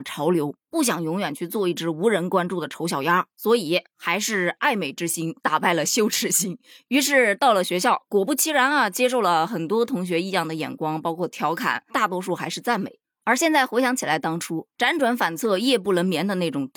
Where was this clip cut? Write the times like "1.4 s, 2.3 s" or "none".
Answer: 3.3 s